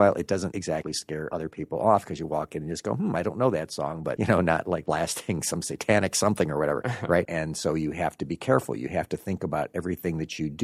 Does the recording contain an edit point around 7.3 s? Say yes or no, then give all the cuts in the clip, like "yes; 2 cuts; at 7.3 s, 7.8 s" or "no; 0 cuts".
yes; 1 cut; at 7.3 s